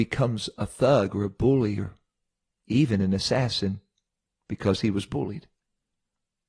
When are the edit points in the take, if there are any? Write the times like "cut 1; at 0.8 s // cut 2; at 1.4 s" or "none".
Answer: none

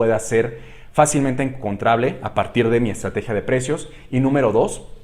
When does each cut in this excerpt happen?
none

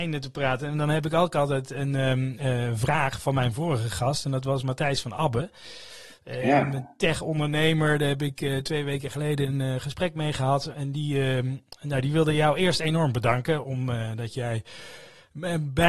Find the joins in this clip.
none

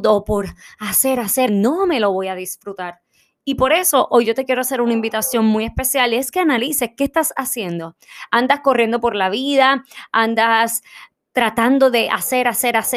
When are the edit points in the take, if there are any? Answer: cut 1; at 1.5 s

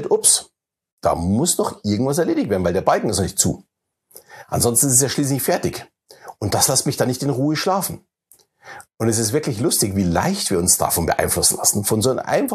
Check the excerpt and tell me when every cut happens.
none

